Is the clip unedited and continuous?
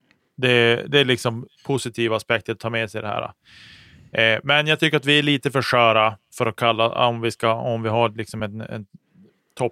yes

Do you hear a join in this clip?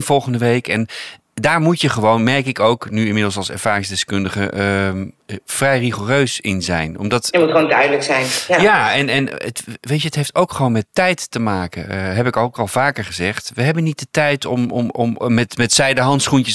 yes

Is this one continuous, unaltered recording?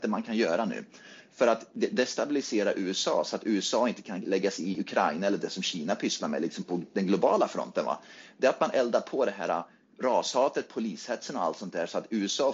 yes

